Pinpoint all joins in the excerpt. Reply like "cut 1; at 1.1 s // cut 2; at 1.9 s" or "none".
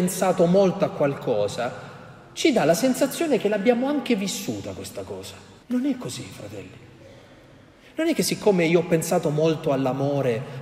cut 1; at 5.6 s